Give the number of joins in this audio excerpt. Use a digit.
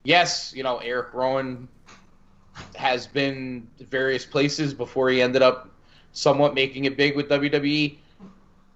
0